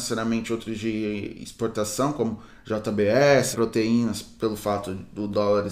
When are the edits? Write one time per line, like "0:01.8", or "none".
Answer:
0:03.5